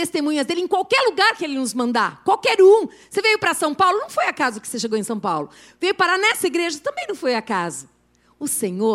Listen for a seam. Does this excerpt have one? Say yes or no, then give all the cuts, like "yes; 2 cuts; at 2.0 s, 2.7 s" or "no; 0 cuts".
no; 0 cuts